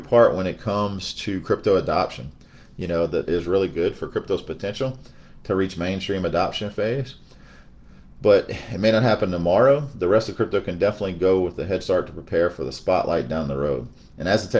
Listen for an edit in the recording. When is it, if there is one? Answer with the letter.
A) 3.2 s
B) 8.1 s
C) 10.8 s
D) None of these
A